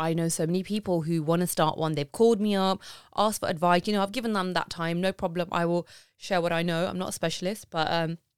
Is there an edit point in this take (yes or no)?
no